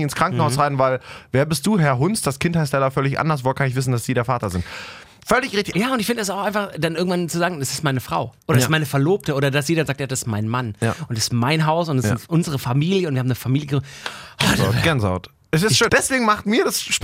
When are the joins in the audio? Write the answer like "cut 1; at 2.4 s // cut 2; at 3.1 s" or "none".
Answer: cut 1; at 5.7 s // cut 2; at 8.4 s // cut 3; at 15.9 s